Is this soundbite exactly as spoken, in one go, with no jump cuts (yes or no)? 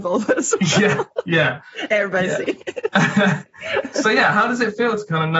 yes